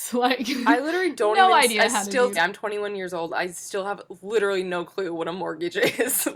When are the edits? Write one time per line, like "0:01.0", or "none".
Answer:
0:02.4